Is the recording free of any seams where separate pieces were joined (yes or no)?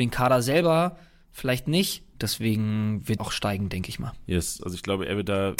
no